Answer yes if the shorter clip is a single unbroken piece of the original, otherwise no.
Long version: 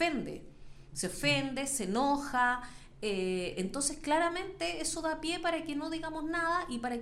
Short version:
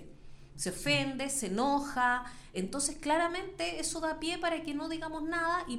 no